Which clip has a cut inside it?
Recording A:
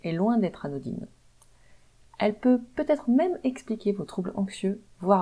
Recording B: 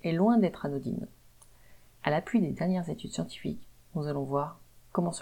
B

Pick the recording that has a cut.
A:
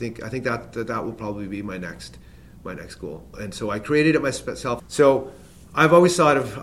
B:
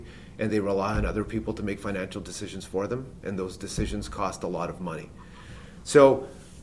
A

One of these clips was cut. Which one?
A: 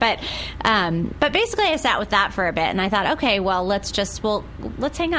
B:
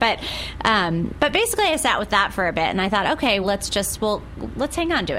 B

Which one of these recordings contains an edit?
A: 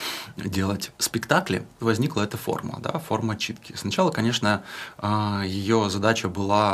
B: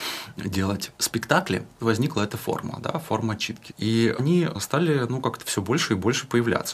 B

